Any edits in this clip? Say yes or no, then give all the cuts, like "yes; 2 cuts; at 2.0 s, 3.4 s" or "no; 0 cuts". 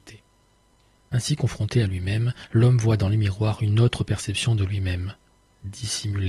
no; 0 cuts